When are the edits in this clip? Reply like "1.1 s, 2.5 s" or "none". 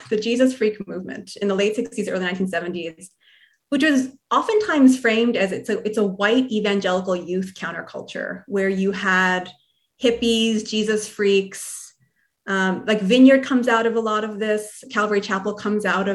none